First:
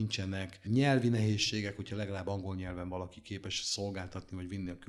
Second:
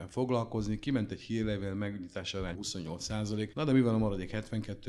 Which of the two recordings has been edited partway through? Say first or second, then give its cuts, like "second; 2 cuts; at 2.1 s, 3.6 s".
second; 1 cut; at 2.5 s